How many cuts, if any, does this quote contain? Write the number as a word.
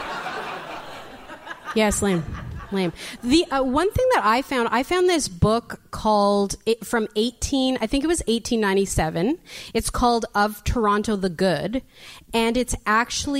zero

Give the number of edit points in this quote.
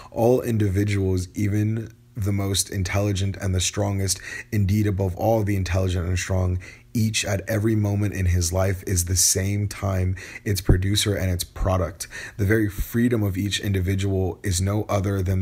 zero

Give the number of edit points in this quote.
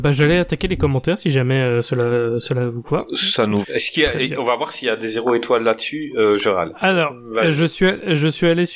one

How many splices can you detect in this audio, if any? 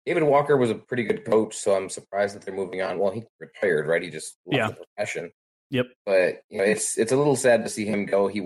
zero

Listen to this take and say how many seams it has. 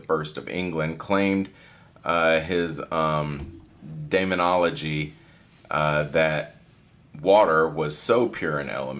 zero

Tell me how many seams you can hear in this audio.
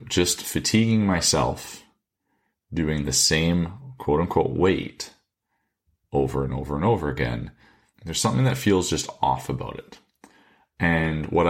one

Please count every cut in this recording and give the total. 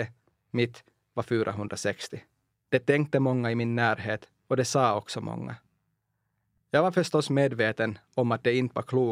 one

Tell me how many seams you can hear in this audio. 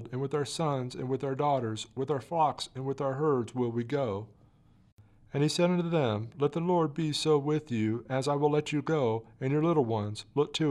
zero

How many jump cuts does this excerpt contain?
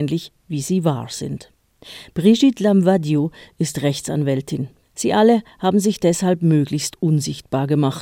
one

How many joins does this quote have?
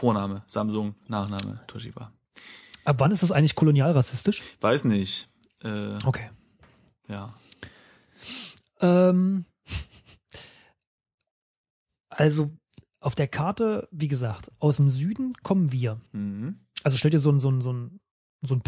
one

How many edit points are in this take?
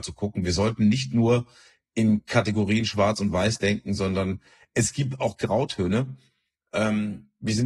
zero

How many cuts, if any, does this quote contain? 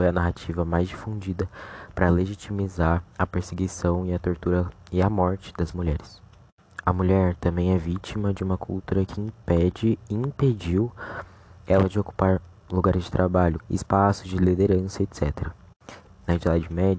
two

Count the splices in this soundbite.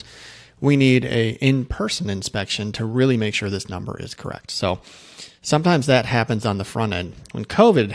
zero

